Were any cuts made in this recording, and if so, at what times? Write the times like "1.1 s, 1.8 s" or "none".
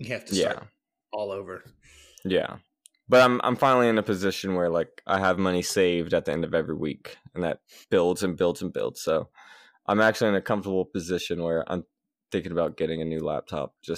none